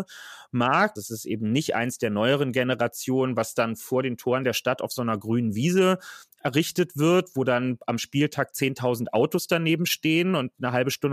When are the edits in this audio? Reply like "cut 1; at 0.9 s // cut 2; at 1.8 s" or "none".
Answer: cut 1; at 1.0 s